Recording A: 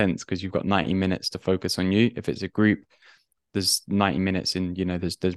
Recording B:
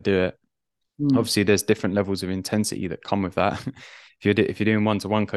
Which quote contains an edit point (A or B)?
A